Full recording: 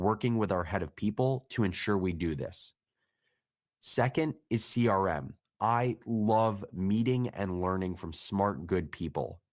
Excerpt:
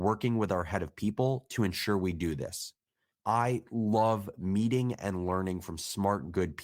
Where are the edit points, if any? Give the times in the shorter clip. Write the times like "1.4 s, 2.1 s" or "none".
3.1 s